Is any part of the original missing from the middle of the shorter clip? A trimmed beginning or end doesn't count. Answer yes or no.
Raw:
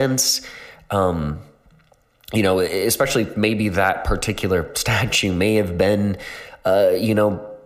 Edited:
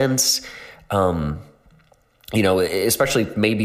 no